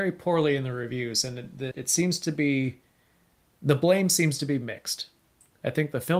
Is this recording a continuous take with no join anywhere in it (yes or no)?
no